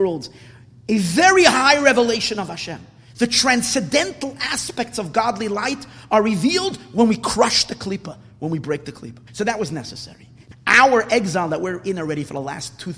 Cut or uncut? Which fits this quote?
cut